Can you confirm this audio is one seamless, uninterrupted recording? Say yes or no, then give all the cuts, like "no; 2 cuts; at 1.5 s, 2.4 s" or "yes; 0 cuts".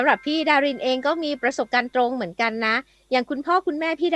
yes; 0 cuts